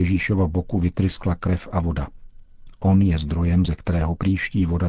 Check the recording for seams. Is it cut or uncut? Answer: uncut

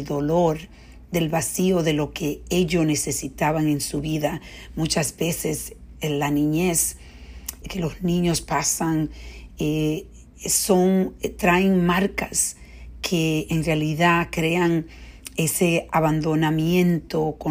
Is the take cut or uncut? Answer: cut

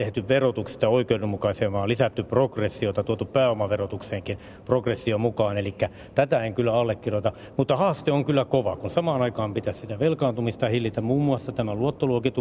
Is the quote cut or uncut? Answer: uncut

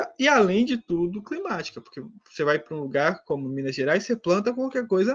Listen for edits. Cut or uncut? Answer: uncut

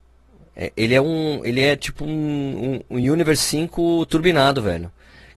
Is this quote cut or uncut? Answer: uncut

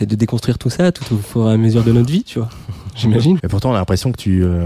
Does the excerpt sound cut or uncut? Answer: cut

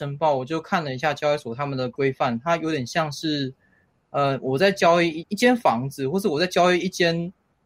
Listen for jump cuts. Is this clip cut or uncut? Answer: cut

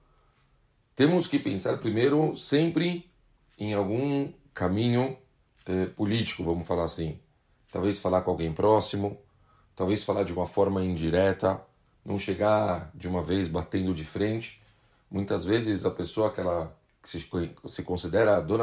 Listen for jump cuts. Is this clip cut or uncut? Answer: uncut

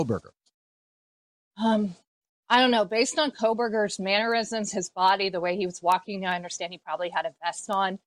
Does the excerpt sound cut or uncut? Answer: uncut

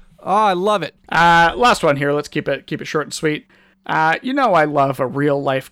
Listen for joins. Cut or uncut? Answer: cut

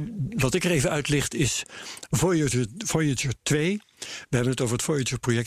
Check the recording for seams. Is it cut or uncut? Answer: uncut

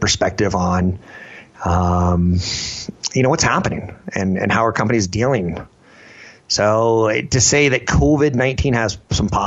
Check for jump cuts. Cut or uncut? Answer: uncut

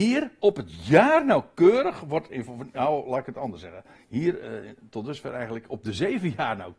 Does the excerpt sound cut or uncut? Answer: uncut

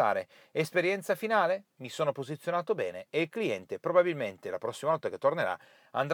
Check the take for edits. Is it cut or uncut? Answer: uncut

